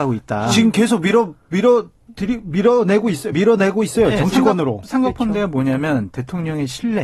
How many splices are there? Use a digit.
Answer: 0